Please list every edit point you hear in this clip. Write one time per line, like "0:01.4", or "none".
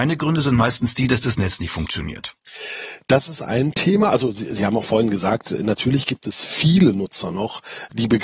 none